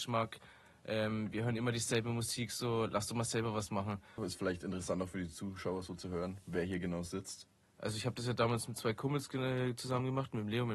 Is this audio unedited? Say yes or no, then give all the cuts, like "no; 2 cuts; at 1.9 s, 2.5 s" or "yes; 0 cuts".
no; 2 cuts; at 4.2 s, 7.6 s